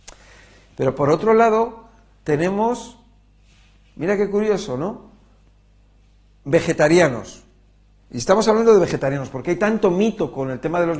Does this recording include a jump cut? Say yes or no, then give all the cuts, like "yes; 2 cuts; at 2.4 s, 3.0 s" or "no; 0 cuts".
no; 0 cuts